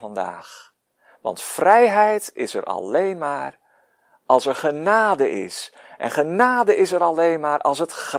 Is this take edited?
no; 0 cuts

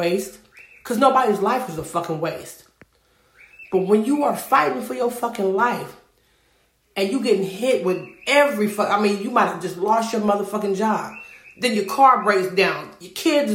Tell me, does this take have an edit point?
no; 0 cuts

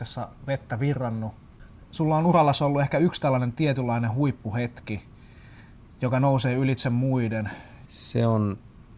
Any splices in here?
yes; 2 cuts; at 1.9 s, 7.9 s

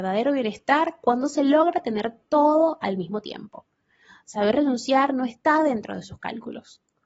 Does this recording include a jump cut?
no; 0 cuts

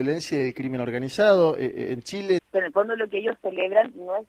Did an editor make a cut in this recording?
yes; 1 cut; at 2.4 s

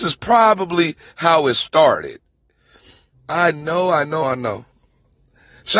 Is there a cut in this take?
yes; 2 cuts; at 3.1 s, 4.2 s

